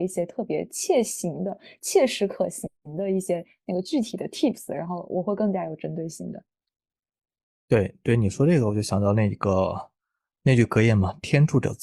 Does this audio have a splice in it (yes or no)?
no